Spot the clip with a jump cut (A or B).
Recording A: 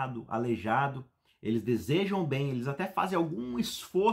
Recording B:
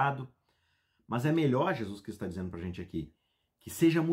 A